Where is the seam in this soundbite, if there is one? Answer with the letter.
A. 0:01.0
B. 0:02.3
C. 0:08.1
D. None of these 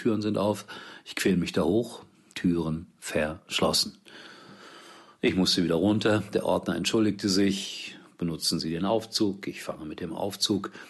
B